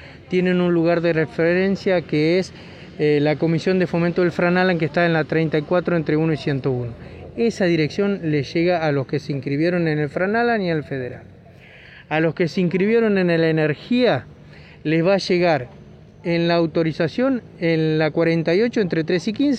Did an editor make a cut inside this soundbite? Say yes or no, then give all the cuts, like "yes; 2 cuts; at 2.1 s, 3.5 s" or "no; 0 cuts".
no; 0 cuts